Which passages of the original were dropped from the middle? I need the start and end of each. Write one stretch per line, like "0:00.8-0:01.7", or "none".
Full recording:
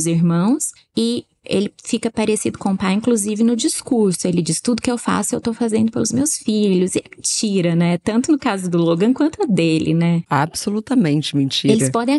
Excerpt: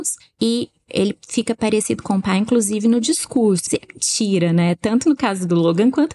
0:04.2-0:06.9